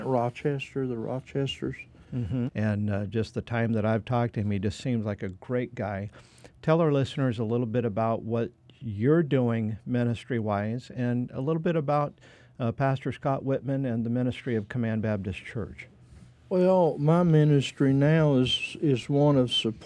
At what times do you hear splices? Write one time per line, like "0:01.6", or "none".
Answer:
0:02.5